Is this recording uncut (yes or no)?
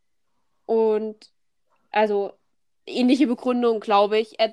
yes